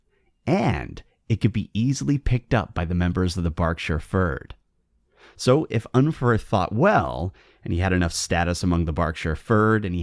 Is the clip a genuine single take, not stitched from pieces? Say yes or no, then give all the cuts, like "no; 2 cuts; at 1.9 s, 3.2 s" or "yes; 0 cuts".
yes; 0 cuts